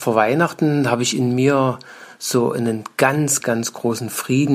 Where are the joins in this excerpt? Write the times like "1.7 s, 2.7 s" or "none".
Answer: 3.4 s